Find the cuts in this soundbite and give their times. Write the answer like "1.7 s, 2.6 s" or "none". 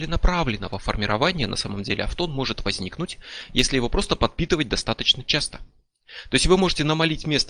none